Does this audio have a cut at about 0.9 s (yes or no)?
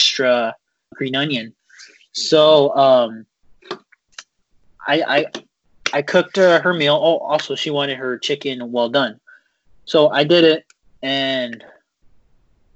yes